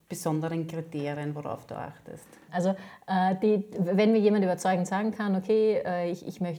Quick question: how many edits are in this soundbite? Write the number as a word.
one